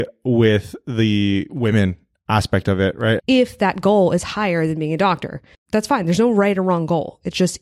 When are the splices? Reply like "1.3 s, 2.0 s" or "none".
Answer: 3.2 s, 5.5 s